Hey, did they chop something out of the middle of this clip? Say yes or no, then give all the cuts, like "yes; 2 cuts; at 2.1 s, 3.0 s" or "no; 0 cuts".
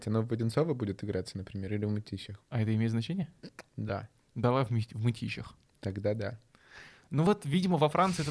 yes; 1 cut; at 2.5 s